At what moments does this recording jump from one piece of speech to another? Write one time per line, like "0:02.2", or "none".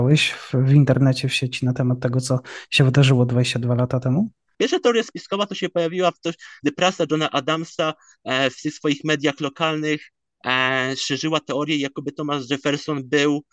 0:04.6
0:06.6